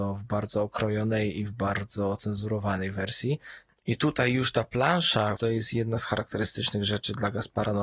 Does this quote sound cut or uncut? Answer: cut